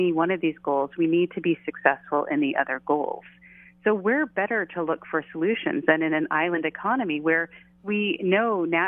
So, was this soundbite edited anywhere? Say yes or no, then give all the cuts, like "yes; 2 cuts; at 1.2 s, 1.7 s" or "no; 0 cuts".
no; 0 cuts